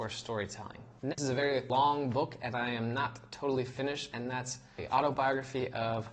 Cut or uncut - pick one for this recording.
cut